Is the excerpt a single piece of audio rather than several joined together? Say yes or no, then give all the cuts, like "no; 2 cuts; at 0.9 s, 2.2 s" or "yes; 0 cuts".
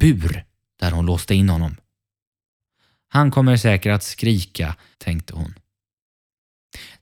no; 1 cut; at 4.9 s